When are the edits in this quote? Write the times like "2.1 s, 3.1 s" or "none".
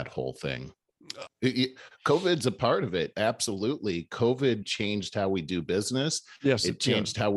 1.3 s, 4.6 s